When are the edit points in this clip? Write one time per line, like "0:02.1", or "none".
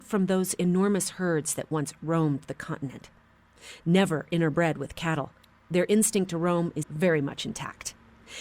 0:06.8